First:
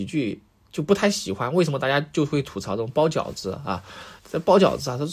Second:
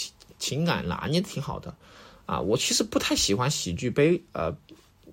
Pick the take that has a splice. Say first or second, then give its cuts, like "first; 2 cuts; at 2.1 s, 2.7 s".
first; 1 cut; at 4.2 s